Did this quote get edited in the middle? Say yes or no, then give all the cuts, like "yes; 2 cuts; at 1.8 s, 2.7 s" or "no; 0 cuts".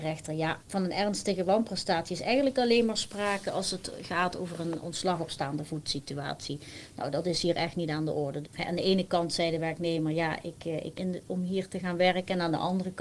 yes; 2 cuts; at 8.4 s, 11.0 s